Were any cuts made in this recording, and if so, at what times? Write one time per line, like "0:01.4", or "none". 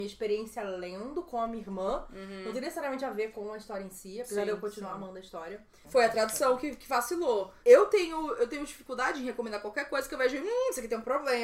0:05.8
0:07.6